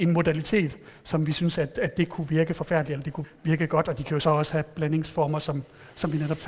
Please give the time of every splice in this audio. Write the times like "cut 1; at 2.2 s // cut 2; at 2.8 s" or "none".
cut 1; at 3.2 s